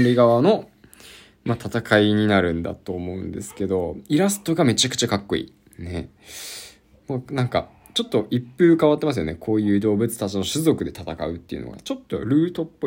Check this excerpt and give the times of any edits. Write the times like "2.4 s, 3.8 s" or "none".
none